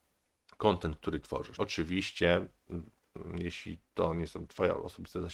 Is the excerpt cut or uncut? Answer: cut